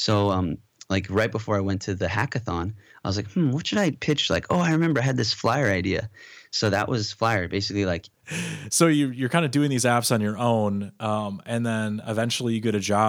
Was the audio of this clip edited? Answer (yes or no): yes